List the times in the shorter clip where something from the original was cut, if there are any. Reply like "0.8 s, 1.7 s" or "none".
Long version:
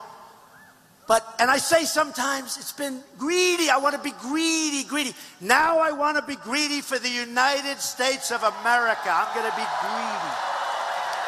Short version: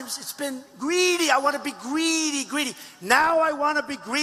none